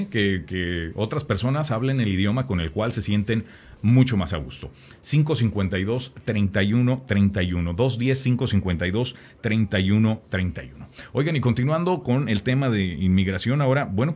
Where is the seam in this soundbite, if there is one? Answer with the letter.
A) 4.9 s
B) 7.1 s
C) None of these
A